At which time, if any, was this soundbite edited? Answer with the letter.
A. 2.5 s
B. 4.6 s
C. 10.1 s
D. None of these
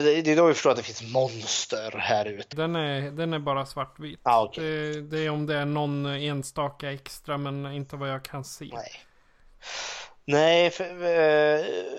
A